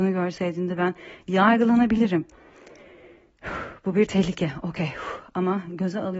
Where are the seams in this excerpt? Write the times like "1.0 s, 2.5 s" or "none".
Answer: none